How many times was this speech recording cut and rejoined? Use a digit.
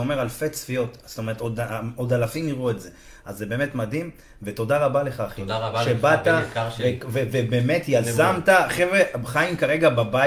0